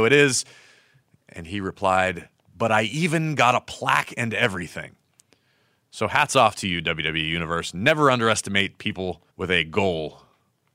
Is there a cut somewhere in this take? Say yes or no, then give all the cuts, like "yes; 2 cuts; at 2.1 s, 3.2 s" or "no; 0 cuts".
yes; 1 cut; at 9.3 s